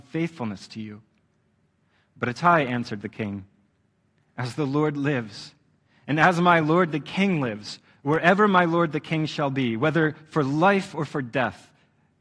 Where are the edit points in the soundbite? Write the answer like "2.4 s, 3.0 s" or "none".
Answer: none